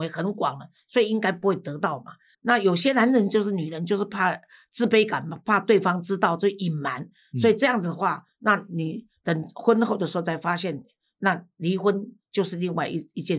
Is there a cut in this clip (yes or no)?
yes